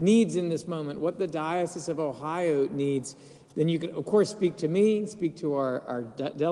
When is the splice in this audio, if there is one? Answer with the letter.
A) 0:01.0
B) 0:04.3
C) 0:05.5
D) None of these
D